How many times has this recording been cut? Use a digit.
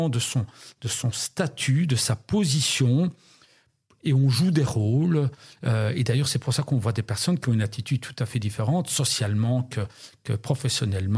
0